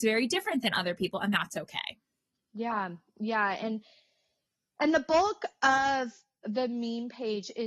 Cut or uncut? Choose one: uncut